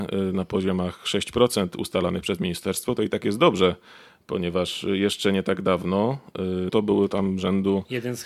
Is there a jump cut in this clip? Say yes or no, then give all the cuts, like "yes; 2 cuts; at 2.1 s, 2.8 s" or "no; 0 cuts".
yes; 1 cut; at 6.7 s